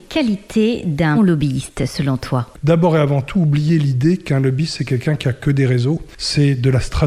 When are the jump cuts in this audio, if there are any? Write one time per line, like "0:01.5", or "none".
0:01.1